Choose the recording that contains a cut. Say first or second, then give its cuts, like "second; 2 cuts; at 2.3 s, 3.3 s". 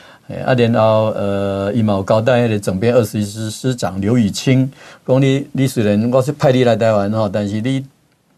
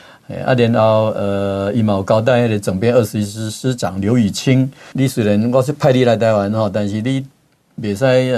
second; 1 cut; at 4.9 s